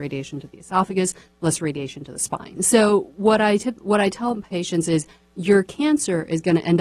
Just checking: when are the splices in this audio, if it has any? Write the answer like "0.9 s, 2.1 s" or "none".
2.6 s